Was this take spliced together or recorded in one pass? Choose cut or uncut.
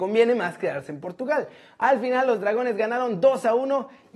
cut